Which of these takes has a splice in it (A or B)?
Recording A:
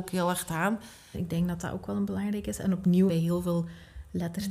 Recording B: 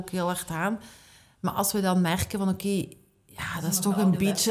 A